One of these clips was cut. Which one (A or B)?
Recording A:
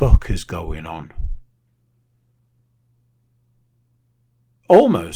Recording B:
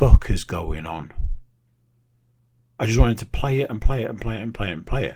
B